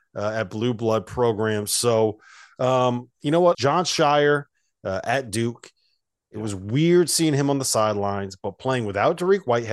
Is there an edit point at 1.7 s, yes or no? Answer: no